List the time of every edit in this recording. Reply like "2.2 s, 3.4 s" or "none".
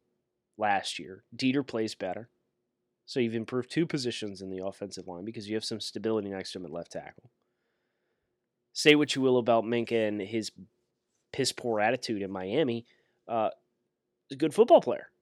none